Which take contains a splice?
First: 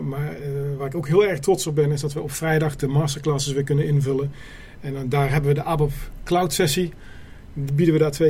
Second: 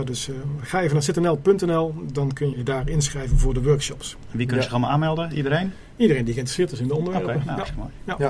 second; 1 cut; at 2.5 s

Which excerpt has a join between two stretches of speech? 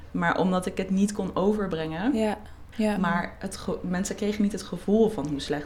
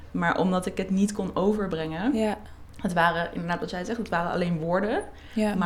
first; 1 cut; at 2.7 s

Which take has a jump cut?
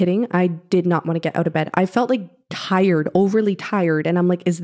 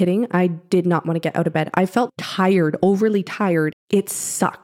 second; 2 cuts; at 2.1 s, 3.7 s

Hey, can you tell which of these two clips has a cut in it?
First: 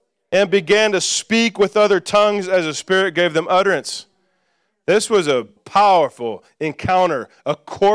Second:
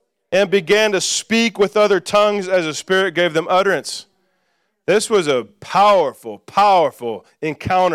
first; 1 cut; at 5.6 s

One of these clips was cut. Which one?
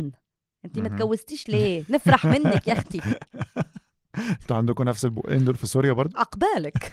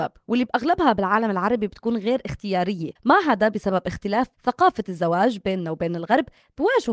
second; 2 cuts; at 3.0 s, 4.3 s

